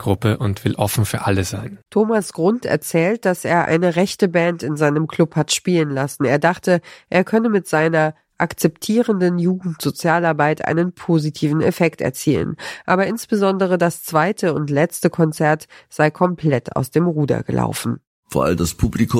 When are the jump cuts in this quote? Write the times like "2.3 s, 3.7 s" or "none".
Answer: 1.8 s